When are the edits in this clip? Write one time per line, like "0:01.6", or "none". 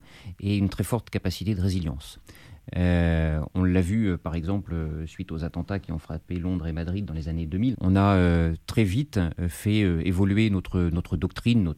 0:07.7